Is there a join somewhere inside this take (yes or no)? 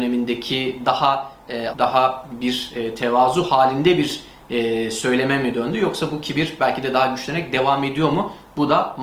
yes